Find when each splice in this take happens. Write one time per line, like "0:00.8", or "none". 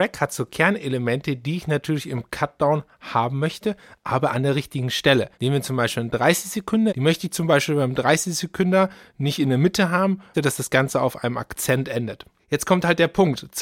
0:05.3
0:06.9
0:10.3